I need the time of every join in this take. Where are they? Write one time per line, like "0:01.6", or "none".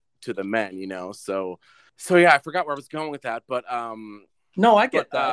none